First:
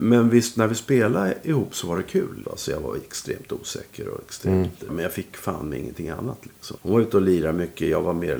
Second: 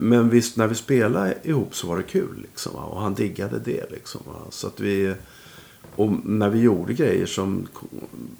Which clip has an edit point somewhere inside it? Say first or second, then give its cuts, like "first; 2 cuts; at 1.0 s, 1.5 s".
first; 3 cuts; at 2.4 s, 4.9 s, 6.8 s